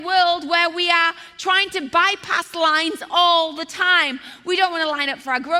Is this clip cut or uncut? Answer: uncut